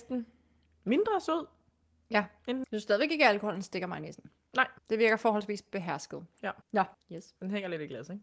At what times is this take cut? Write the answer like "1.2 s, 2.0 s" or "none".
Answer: 2.6 s, 4.8 s, 6.9 s